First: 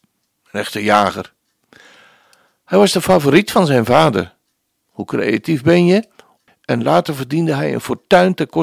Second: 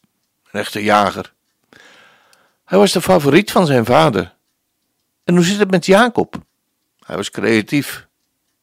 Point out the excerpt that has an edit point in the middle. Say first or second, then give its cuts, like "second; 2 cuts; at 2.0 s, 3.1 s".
first; 2 cuts; at 4.8 s, 6.5 s